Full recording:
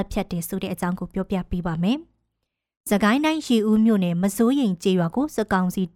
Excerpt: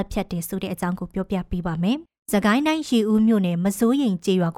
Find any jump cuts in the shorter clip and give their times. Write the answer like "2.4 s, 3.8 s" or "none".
2.1 s